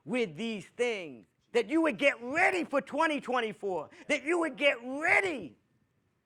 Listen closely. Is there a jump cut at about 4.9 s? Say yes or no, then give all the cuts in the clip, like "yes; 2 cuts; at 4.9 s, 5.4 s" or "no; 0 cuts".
no; 1 cut; at 1.3 s